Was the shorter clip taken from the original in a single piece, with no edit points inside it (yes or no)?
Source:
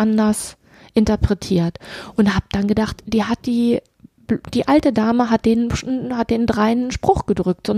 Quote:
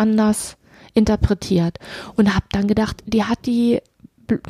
yes